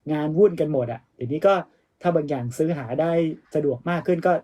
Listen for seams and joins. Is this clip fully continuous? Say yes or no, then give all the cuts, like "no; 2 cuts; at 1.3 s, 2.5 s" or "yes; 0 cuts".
no; 1 cut; at 3.4 s